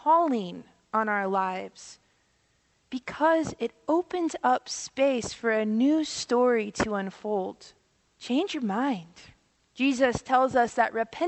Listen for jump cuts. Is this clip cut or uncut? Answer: cut